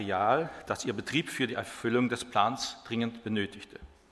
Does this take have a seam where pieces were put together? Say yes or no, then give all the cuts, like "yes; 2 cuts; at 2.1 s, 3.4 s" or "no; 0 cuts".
no; 0 cuts